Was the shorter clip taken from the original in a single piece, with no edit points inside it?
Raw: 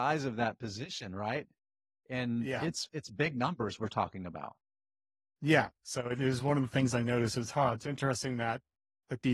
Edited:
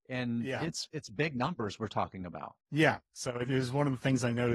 no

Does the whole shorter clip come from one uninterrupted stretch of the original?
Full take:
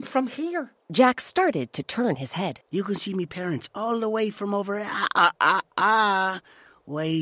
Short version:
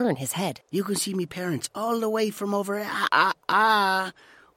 no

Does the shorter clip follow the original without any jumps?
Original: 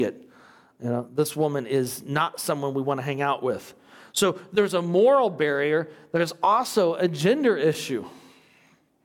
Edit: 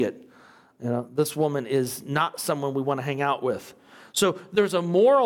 yes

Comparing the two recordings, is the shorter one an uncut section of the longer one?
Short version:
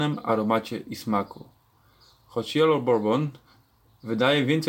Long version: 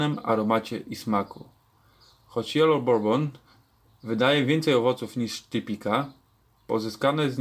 yes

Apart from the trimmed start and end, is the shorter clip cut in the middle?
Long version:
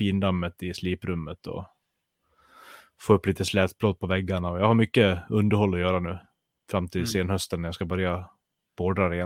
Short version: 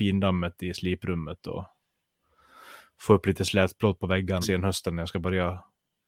yes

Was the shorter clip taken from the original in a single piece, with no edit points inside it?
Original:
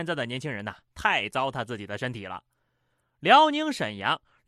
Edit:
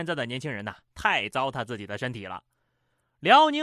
yes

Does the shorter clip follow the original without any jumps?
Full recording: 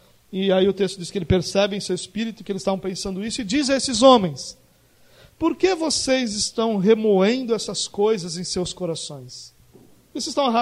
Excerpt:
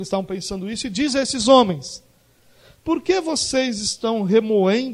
yes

